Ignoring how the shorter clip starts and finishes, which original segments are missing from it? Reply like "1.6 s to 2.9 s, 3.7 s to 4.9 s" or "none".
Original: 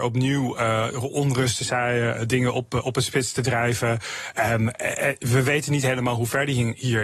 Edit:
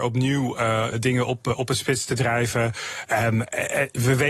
0.9 s to 2.2 s